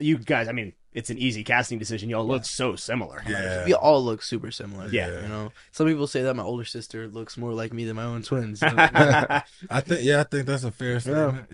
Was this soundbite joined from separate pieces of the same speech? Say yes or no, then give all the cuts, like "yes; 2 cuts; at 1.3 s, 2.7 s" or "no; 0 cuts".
no; 0 cuts